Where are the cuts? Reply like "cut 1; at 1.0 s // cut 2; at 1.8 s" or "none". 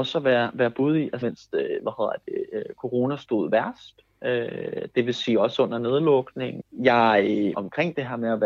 cut 1; at 1.2 s // cut 2; at 7.5 s